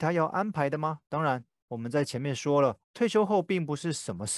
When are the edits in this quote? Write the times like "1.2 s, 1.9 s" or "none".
2.8 s

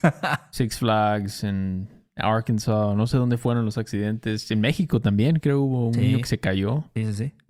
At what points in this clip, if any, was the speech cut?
none

